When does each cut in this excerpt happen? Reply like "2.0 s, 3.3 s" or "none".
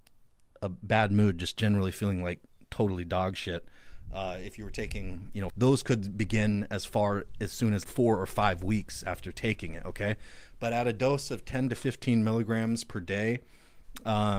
5.5 s, 7.8 s